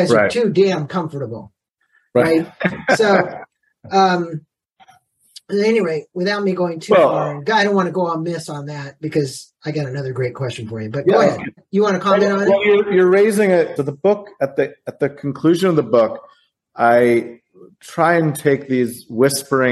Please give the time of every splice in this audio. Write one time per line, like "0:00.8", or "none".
0:11.6
0:13.8